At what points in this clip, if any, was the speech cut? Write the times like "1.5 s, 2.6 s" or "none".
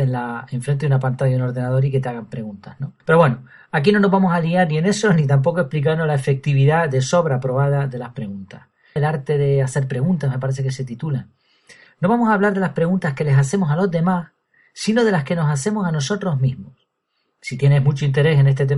3.0 s, 9.0 s, 11.9 s